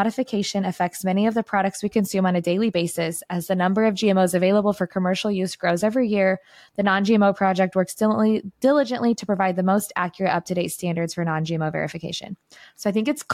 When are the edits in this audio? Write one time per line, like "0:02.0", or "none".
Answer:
none